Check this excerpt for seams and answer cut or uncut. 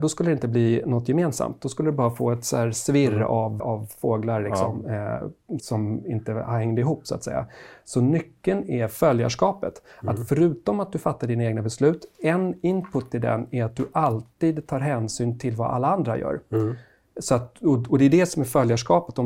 cut